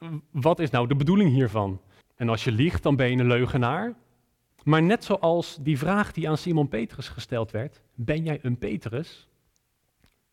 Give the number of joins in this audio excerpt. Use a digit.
2